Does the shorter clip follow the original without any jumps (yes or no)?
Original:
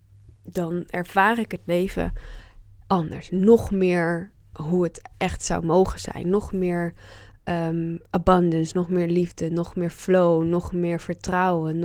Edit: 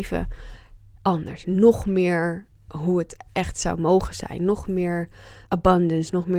no